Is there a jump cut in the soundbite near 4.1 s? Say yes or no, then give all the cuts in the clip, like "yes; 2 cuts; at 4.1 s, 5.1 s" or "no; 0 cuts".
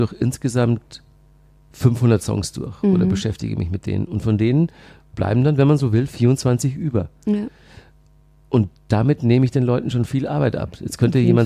no; 0 cuts